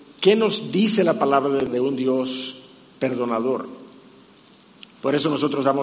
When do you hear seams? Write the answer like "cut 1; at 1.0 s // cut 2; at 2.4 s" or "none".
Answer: cut 1; at 4.8 s